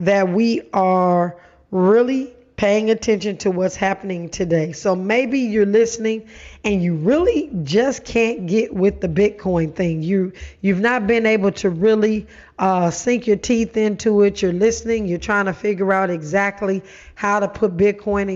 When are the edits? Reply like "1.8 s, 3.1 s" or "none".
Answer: none